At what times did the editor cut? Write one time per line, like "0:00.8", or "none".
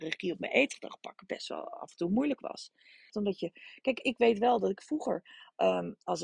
0:03.1